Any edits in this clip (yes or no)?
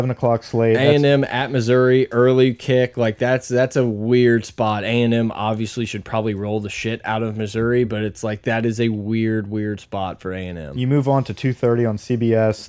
no